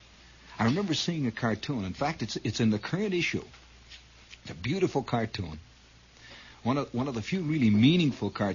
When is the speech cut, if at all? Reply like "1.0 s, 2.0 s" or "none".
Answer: none